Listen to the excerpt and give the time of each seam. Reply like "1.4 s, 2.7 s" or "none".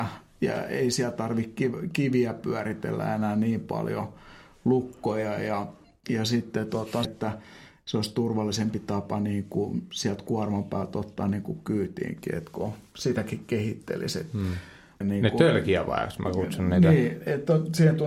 7.0 s, 15.0 s